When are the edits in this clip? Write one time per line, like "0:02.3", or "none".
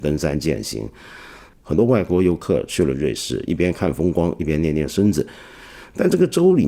0:01.5
0:03.5